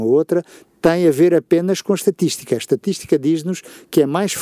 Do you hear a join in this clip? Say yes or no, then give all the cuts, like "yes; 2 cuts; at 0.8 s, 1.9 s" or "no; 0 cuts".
no; 0 cuts